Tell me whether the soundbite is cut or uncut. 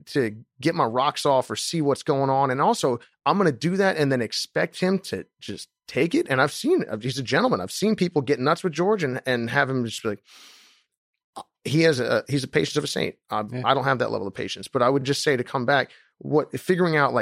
uncut